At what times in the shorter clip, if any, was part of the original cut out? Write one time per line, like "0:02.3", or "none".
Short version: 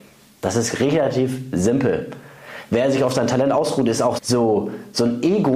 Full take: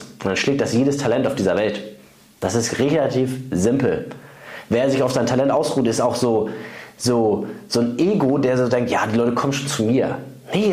0:04.2